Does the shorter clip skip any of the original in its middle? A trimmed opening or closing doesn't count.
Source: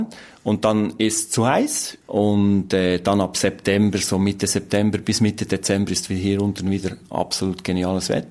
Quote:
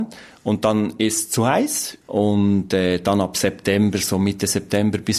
no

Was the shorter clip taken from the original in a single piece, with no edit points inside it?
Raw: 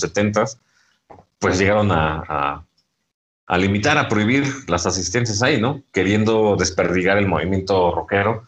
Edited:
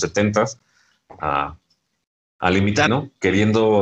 no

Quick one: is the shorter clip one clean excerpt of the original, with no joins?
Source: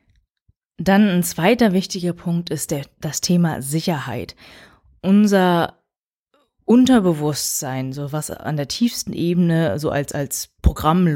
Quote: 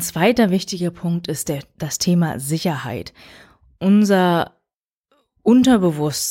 yes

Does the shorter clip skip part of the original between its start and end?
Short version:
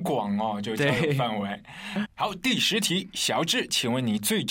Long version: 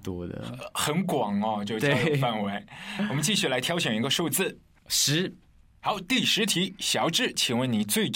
yes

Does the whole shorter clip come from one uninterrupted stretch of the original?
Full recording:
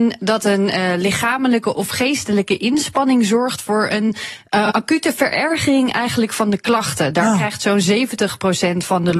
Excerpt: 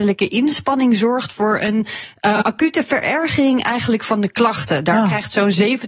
yes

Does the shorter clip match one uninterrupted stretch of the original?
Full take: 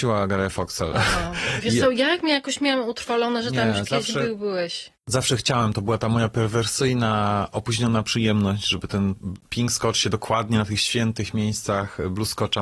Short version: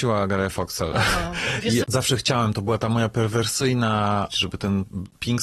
no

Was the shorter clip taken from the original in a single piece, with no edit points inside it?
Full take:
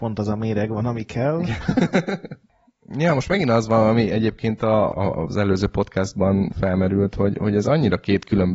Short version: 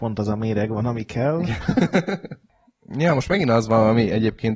yes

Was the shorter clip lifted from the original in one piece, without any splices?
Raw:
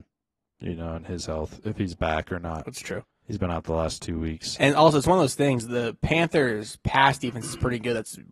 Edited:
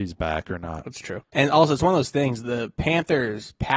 no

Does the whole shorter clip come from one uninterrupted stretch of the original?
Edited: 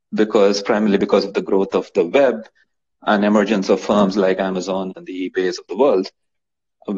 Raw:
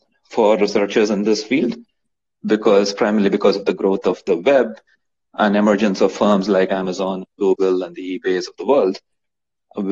no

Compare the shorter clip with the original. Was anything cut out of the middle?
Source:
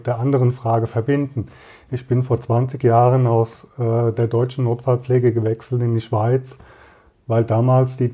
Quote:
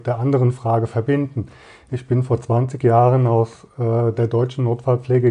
no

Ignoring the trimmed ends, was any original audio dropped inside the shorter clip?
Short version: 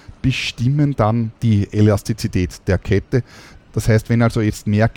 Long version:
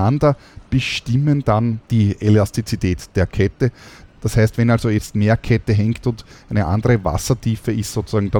no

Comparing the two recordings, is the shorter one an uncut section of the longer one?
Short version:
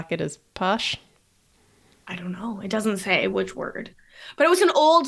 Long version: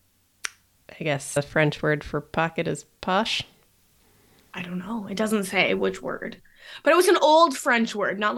yes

